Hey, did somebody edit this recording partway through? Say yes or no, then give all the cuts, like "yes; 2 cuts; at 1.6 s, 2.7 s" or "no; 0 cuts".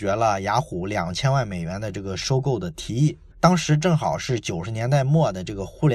yes; 1 cut; at 3.3 s